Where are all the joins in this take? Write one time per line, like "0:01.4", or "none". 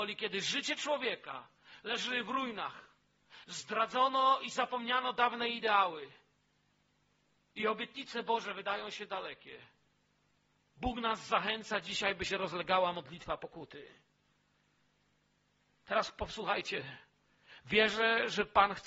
none